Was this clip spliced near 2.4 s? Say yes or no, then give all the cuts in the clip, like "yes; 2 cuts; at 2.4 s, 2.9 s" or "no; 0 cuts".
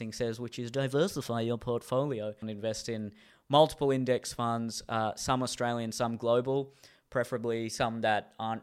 yes; 1 cut; at 2.4 s